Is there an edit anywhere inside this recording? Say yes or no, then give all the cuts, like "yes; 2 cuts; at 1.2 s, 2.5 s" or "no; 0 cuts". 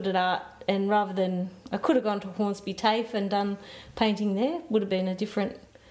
no; 0 cuts